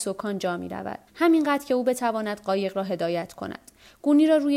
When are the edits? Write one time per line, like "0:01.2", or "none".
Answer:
0:01.1

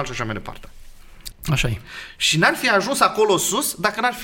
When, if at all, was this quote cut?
0:01.3

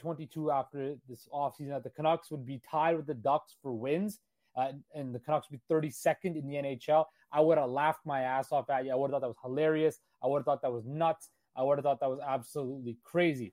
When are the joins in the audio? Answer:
none

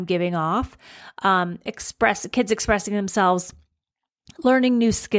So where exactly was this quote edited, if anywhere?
none

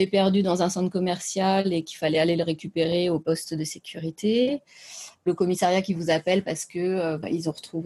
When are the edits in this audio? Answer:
none

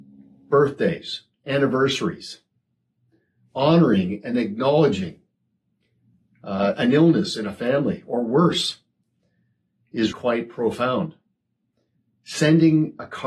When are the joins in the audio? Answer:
0:10.1

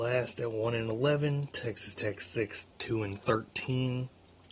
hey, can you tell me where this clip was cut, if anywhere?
none

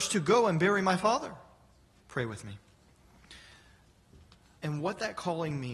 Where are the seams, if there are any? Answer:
0:02.0
0:04.6

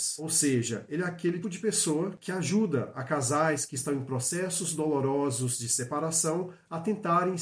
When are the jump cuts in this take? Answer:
0:01.4

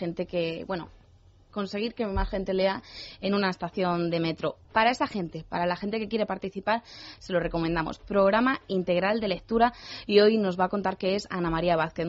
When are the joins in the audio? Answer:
none

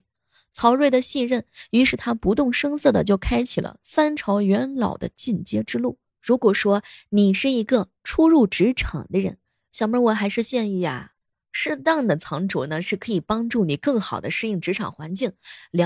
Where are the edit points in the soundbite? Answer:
0:06.2

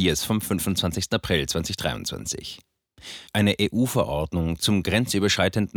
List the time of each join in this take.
0:03.3

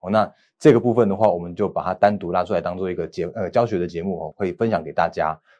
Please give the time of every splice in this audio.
0:04.3

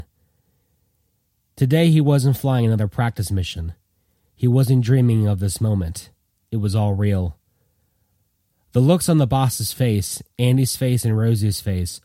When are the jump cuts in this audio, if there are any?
none

